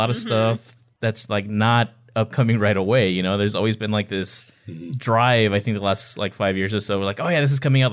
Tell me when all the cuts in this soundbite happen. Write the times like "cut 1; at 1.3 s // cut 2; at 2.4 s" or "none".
none